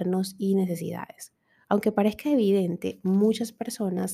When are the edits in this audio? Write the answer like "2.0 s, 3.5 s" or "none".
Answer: 1.6 s